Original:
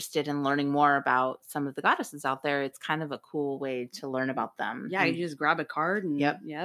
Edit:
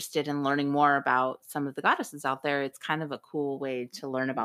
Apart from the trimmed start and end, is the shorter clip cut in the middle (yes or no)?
no